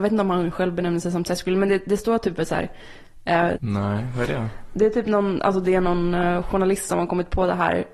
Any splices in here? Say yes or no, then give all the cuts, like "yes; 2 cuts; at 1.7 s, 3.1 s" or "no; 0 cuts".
yes; 1 cut; at 3.5 s